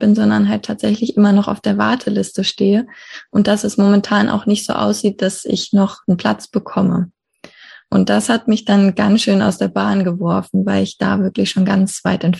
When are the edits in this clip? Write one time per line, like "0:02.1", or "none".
none